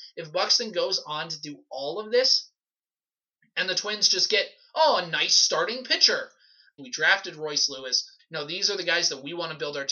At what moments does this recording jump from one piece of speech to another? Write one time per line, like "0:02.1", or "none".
0:06.8
0:08.2